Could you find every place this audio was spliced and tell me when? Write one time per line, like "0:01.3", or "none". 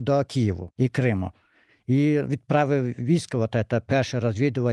none